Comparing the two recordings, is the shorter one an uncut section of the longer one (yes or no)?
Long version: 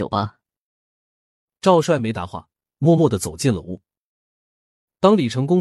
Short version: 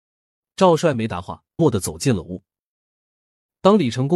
no